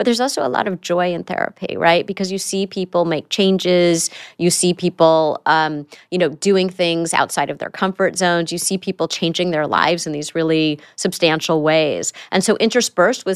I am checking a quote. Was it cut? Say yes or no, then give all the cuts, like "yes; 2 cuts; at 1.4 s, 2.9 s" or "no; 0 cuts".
no; 0 cuts